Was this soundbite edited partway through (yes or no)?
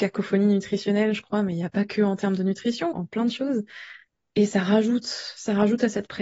yes